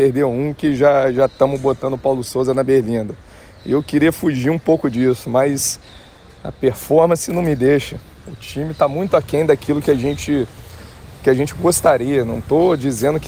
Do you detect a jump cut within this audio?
no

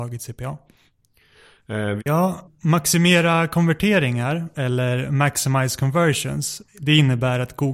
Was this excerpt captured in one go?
no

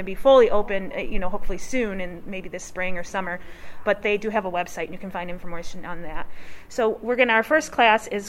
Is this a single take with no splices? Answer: yes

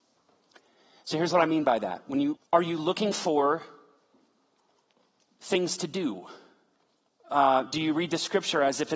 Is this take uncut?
no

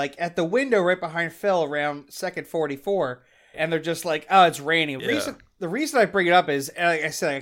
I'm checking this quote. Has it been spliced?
yes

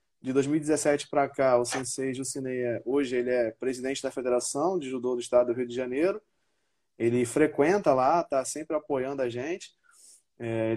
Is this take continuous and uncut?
yes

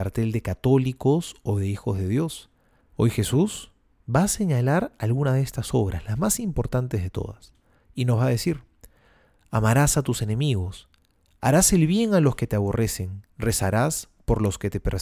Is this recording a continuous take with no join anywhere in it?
no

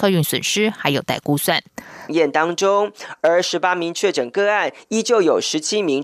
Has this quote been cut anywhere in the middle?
yes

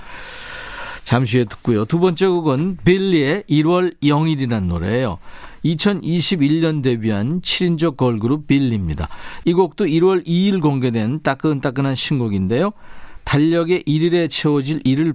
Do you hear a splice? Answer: no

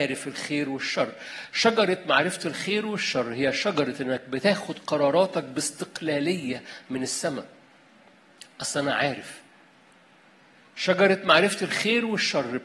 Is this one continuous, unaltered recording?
yes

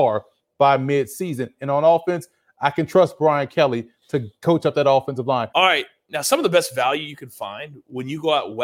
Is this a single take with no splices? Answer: no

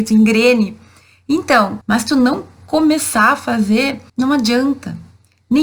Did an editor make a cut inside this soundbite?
yes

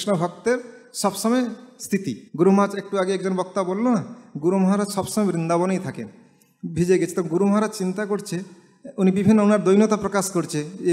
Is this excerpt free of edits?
no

